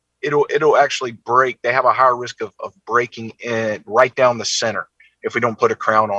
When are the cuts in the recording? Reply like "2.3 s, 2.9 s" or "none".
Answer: none